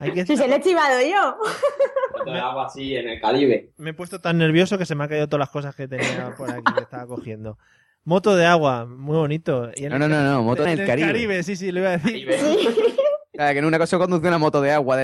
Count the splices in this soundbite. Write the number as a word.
one